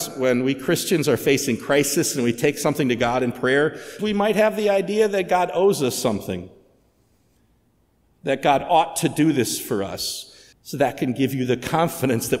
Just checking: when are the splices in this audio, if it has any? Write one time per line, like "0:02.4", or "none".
0:04.0
0:10.5